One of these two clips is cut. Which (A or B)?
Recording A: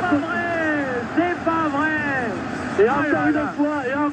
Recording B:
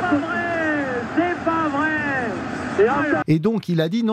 B